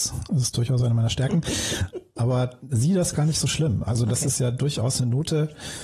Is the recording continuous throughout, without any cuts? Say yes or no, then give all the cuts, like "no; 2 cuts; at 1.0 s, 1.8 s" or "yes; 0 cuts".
yes; 0 cuts